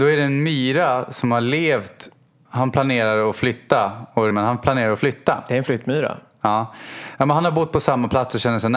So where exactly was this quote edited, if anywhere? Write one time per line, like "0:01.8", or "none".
0:02.5
0:04.3